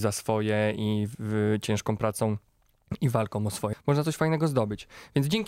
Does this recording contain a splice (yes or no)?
yes